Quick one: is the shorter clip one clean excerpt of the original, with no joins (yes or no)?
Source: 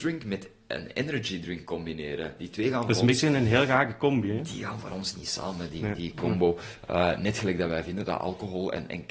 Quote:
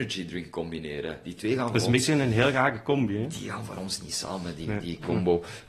yes